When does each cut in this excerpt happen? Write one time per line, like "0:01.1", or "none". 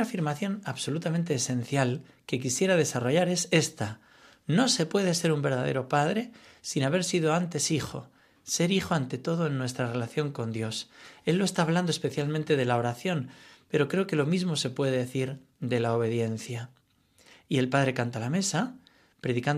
none